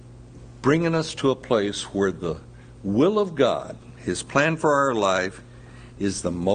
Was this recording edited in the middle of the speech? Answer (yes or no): no